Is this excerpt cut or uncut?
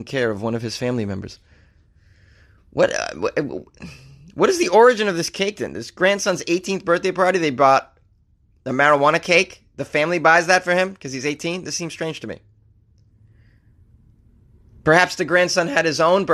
uncut